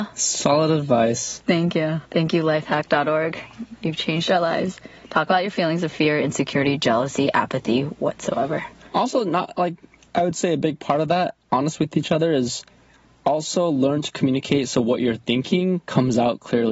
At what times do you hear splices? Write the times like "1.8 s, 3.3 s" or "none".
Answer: 2.0 s